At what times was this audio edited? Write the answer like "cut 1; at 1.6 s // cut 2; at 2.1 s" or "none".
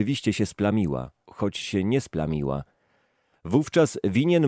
cut 1; at 1.3 s